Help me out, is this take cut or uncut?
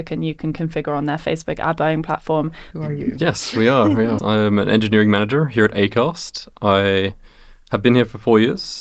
cut